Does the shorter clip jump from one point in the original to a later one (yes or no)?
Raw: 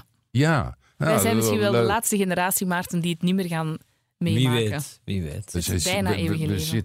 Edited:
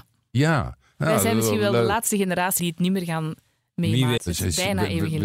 yes